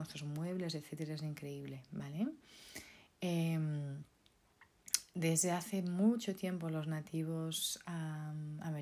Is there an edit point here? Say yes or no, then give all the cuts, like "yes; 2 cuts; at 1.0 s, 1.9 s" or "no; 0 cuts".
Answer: no; 0 cuts